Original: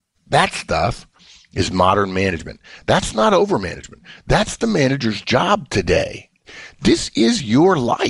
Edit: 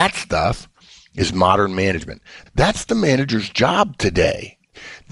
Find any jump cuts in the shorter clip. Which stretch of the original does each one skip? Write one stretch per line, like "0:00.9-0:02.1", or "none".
0:02.8-0:04.2